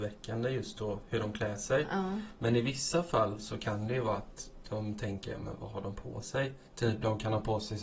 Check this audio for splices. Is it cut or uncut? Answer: cut